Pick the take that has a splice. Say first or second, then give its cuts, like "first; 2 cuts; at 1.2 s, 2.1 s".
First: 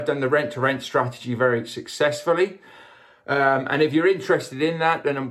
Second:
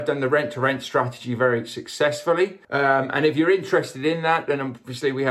second; 1 cut; at 2.6 s